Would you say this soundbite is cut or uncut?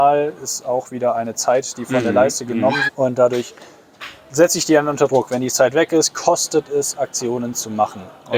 cut